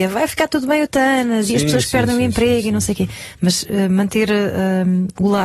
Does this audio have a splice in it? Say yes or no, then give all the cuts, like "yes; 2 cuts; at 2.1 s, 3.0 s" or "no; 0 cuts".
no; 0 cuts